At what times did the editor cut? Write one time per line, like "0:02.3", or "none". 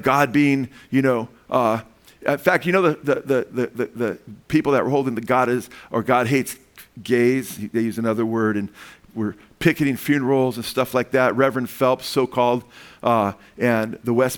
none